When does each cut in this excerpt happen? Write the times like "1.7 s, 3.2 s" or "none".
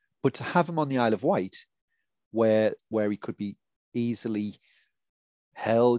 2.8 s